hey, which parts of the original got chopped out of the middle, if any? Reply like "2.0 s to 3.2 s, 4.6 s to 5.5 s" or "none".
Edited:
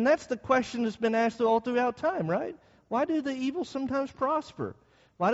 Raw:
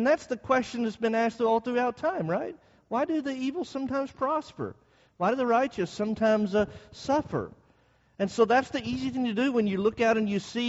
none